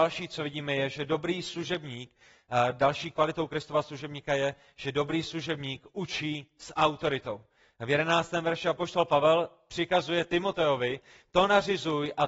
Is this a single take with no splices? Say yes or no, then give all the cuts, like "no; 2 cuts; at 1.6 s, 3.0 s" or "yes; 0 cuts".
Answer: yes; 0 cuts